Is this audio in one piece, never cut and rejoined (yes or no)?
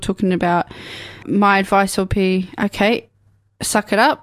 no